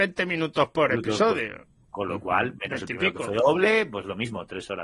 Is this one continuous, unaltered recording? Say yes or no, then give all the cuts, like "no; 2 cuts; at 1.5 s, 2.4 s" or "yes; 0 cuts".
yes; 0 cuts